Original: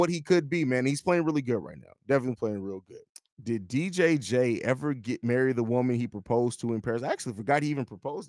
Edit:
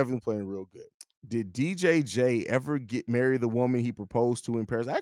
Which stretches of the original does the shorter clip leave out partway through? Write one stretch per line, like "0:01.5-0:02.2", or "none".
none